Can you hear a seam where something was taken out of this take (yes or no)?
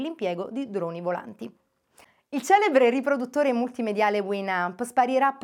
no